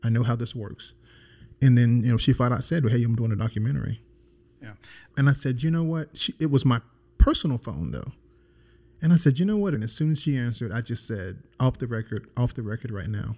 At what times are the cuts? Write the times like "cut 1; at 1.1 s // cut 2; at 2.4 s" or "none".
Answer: cut 1; at 1.5 s // cut 2; at 5.1 s // cut 3; at 9.8 s